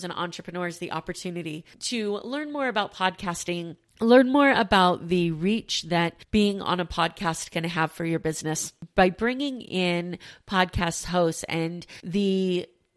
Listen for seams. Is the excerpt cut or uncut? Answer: uncut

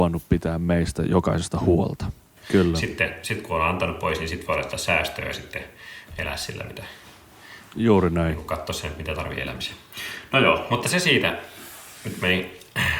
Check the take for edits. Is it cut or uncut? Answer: cut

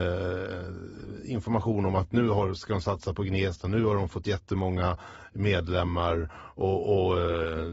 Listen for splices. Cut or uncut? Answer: uncut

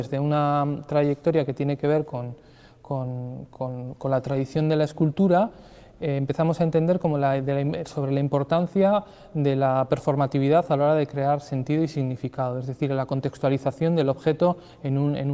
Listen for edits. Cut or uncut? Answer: uncut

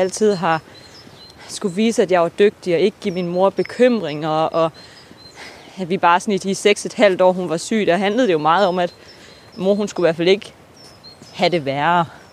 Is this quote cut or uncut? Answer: uncut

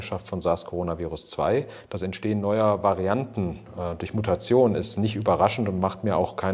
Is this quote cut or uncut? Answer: cut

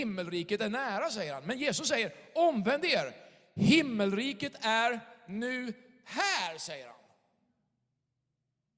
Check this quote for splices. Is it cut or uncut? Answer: uncut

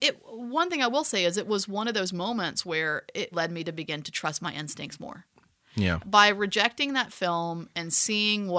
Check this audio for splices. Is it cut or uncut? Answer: cut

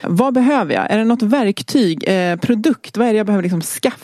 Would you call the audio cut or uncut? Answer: uncut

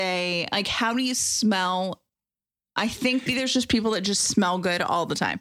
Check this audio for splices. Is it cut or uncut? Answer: cut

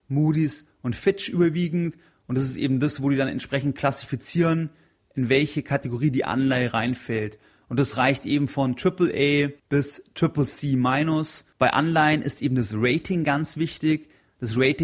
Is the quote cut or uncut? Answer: cut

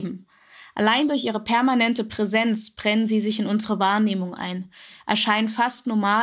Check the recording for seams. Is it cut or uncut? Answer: uncut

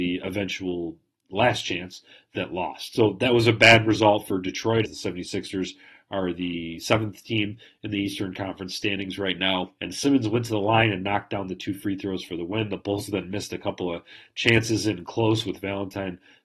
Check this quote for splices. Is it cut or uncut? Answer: cut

